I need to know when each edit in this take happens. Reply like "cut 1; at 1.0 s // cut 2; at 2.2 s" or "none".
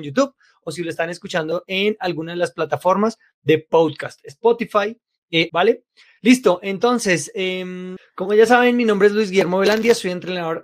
cut 1; at 5.5 s

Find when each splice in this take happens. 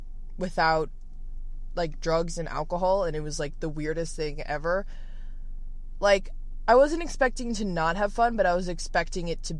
none

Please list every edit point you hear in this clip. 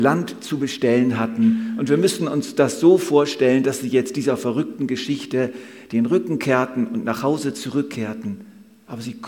none

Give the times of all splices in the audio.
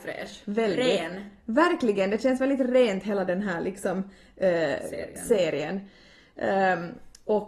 none

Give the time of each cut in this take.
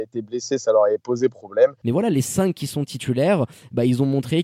cut 1; at 1.8 s

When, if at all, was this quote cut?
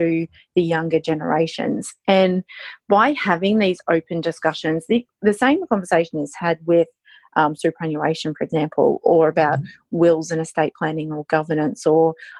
none

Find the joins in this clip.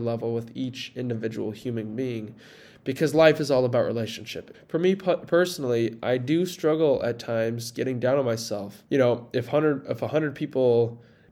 cut 1; at 4.5 s // cut 2; at 8.9 s

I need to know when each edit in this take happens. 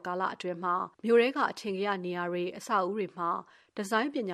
cut 1; at 0.9 s

